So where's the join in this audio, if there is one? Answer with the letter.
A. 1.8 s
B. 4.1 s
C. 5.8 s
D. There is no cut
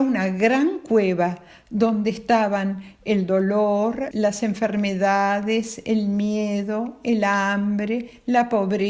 B